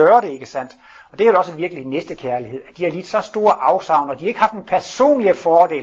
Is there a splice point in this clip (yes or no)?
no